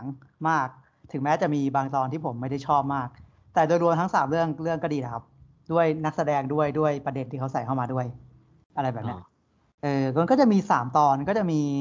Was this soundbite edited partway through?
no; 0 cuts

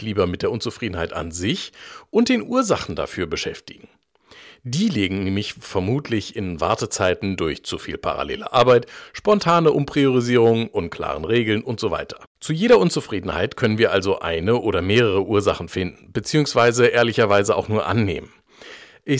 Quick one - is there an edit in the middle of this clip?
yes; 1 cut; at 12.3 s

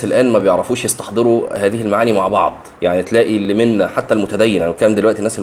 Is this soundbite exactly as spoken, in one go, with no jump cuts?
no; 1 cut; at 2.8 s

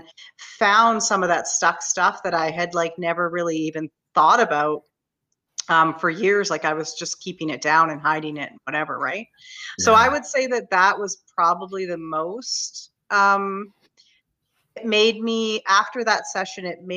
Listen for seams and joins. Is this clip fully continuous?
yes; 0 cuts

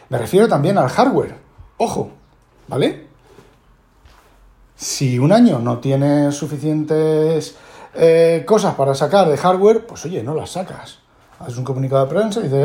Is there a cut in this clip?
no; 0 cuts

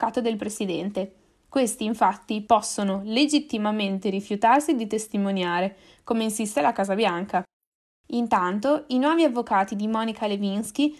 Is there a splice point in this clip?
no; 0 cuts

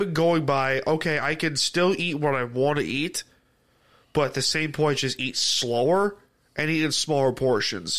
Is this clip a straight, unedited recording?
yes; 0 cuts

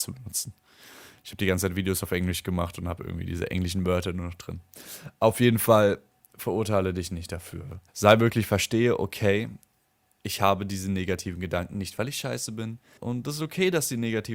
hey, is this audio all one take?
no; 2 cuts; at 7.9 s, 13.0 s

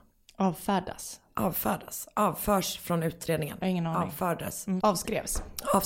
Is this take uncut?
no; 1 cut; at 4.8 s

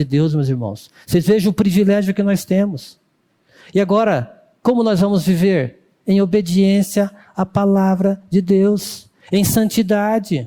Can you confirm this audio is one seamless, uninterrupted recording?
yes; 0 cuts

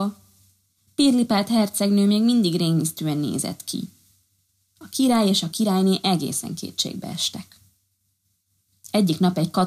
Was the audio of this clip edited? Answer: no; 0 cuts

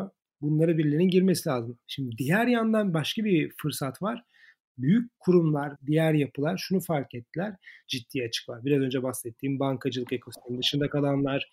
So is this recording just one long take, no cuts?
no; 2 cuts; at 5.8 s, 7.8 s

